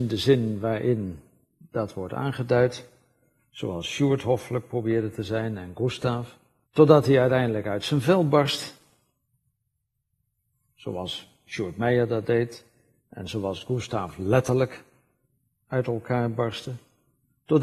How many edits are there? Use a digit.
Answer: 1